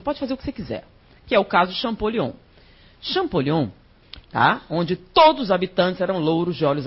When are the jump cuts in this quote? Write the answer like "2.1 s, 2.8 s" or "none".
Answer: 4.2 s

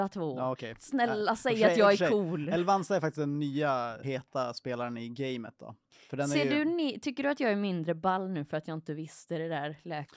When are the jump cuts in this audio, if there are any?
4.0 s

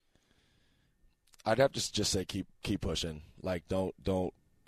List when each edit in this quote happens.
none

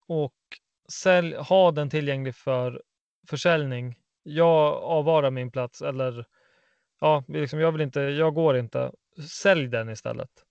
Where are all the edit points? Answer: none

